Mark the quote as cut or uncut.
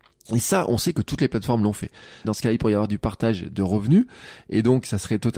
cut